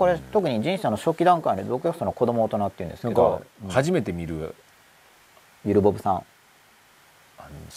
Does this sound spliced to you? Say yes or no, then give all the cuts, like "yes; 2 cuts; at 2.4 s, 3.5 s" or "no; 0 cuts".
no; 0 cuts